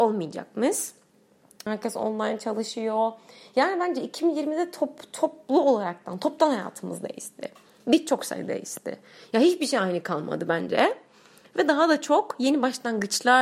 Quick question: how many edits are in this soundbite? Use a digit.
1